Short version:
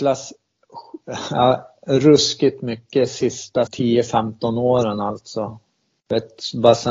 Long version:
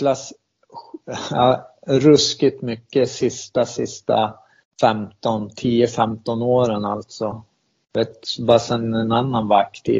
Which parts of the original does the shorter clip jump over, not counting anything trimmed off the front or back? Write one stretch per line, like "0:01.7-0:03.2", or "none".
0:03.7-0:05.5